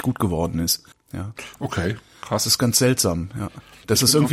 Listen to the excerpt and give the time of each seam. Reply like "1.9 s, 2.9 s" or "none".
0.9 s

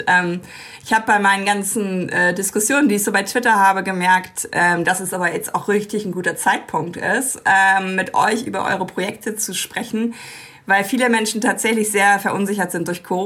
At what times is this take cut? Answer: none

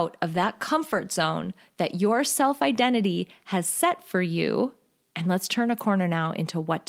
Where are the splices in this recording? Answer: 5.0 s

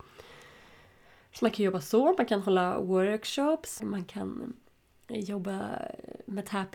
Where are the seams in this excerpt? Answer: 3.8 s

